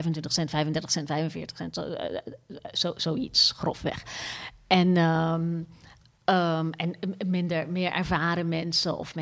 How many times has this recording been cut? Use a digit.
0